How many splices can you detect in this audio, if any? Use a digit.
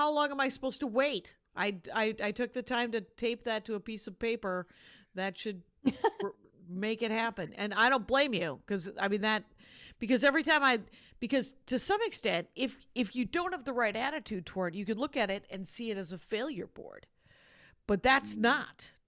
0